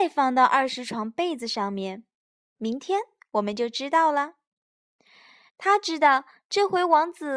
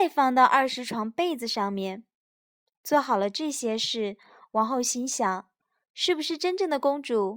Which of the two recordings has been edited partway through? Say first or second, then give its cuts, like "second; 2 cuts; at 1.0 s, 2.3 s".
first; 2 cuts; at 2.5 s, 5.5 s